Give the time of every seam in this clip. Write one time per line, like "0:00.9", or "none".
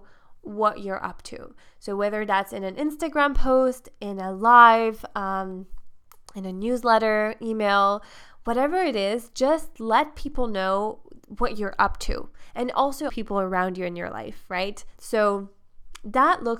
0:13.1
0:15.0